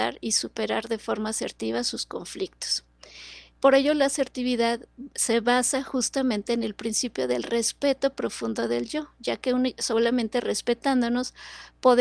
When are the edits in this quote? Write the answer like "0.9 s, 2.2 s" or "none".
3.5 s